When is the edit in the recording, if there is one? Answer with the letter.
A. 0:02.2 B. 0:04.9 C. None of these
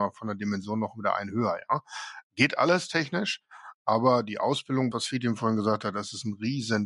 B